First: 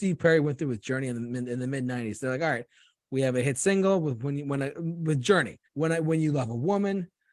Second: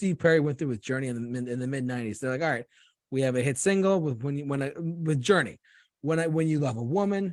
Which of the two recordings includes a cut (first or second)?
first